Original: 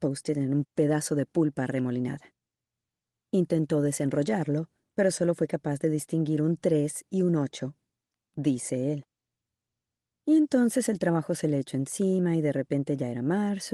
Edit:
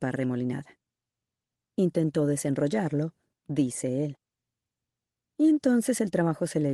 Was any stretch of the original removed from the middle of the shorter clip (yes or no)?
yes